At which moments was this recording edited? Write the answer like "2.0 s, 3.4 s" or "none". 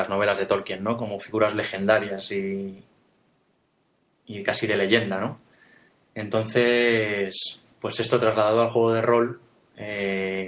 1.0 s